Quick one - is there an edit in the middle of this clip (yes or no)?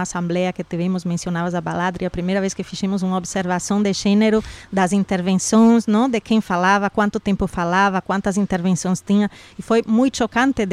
no